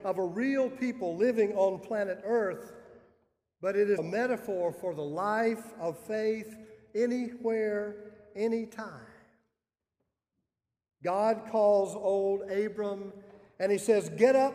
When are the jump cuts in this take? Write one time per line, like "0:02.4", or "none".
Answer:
0:04.0